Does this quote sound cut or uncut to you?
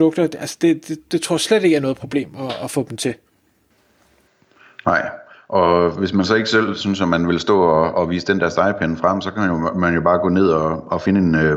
uncut